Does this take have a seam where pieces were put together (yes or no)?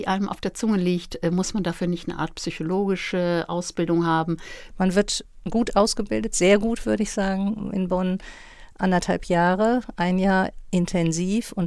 yes